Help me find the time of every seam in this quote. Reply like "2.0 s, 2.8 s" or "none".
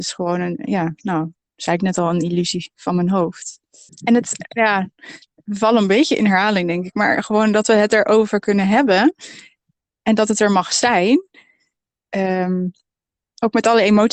3.9 s